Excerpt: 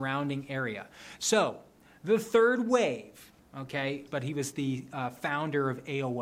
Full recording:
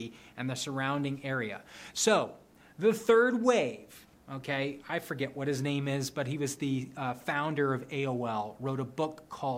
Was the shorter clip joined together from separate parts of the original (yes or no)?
yes